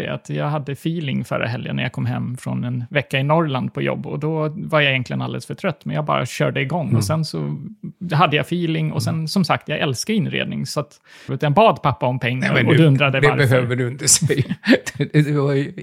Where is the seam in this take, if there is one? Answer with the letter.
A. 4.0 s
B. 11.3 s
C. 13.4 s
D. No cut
B